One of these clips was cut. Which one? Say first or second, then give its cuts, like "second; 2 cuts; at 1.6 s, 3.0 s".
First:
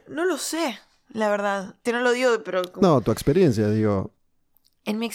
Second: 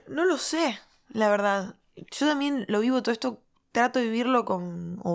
first; 1 cut; at 1.9 s